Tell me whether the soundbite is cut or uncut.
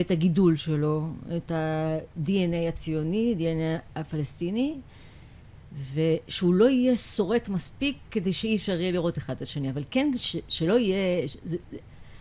uncut